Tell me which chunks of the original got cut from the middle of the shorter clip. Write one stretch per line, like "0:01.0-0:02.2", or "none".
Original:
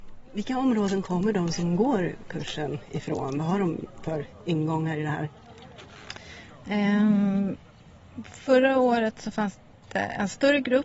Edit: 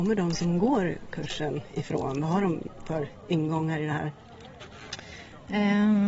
none